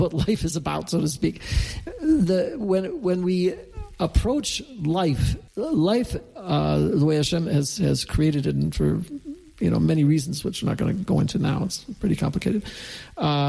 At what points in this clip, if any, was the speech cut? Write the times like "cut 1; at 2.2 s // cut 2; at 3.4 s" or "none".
cut 1; at 5.5 s